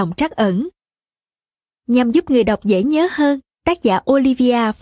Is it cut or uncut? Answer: uncut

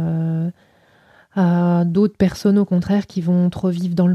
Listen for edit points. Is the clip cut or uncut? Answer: uncut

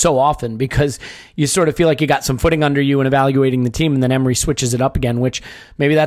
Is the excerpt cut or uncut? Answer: uncut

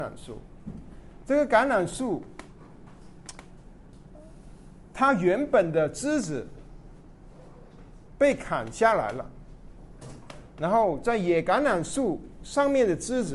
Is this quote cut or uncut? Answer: uncut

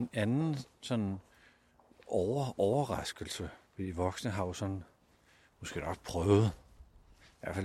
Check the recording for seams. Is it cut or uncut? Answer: cut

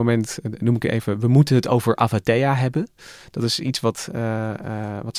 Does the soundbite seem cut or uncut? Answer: uncut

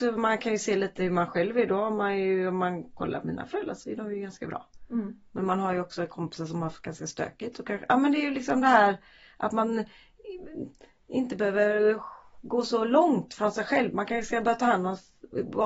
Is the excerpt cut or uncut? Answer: uncut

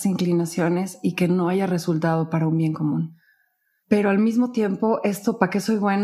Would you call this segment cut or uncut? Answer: uncut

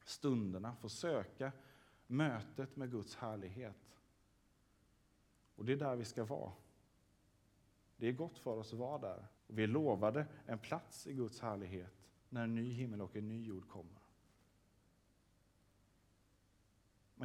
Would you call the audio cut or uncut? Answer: cut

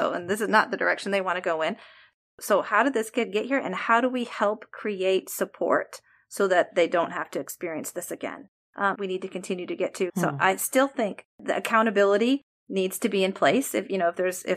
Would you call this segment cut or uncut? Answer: cut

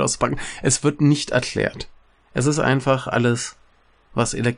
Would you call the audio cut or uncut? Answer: uncut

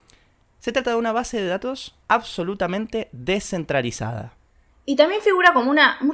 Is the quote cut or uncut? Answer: cut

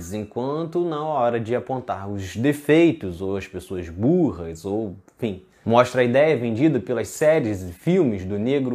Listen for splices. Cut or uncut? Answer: cut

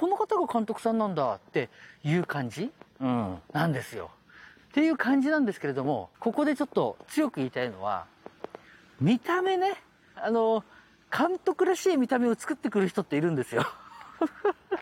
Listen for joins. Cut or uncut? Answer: cut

